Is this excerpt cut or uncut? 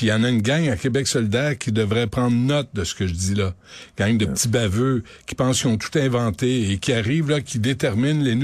uncut